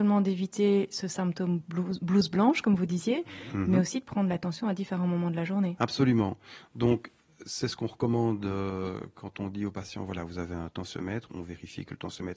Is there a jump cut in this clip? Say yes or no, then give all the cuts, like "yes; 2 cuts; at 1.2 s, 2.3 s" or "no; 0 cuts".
no; 0 cuts